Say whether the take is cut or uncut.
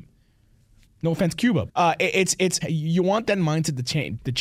cut